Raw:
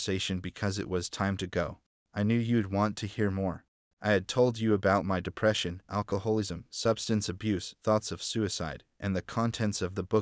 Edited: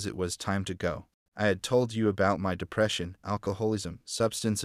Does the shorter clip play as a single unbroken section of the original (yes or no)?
no